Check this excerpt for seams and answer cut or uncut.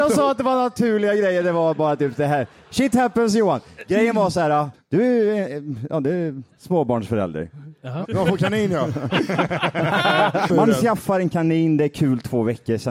cut